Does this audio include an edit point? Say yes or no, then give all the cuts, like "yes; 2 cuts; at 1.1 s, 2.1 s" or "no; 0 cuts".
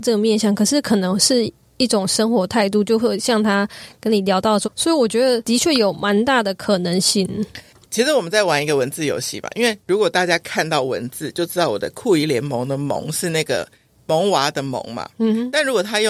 yes; 1 cut; at 4.6 s